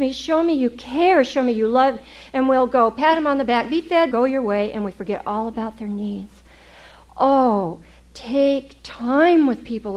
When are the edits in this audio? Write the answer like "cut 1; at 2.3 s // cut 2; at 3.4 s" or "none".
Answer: cut 1; at 4.1 s

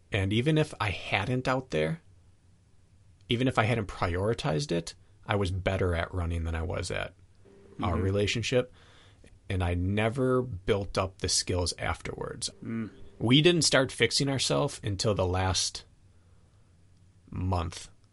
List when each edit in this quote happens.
cut 1; at 12.5 s

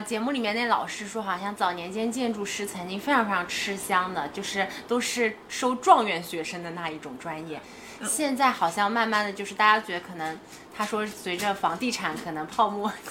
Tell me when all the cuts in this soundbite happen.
none

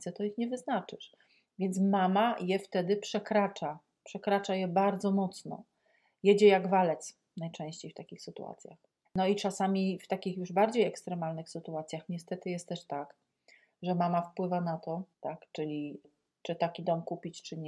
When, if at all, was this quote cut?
cut 1; at 9.1 s // cut 2; at 15.1 s

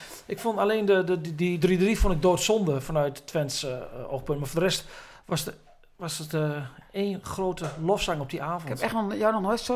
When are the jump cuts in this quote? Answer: cut 1; at 1.6 s

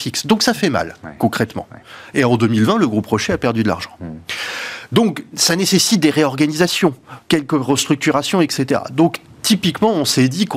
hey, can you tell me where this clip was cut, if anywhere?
none

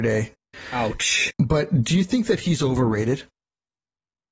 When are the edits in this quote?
cut 1; at 1.3 s

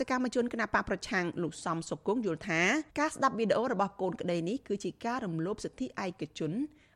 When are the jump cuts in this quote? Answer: cut 1; at 2.9 s

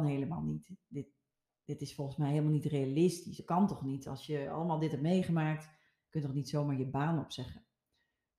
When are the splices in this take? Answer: none

